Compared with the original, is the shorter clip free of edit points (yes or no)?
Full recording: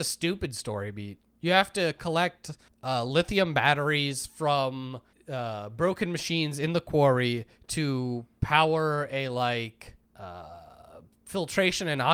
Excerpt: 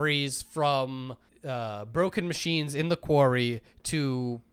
yes